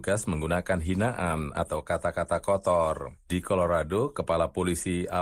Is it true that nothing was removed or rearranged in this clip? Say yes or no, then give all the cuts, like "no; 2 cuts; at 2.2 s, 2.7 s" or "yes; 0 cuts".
no; 1 cut; at 1.5 s